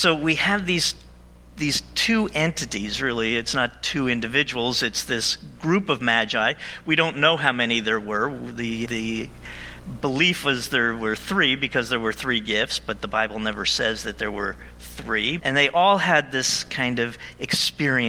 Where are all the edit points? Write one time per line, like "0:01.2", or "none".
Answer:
0:08.8
0:15.4